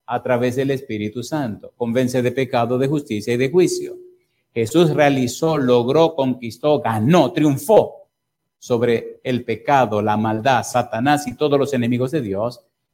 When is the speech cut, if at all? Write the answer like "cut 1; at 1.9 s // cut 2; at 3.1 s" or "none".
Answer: none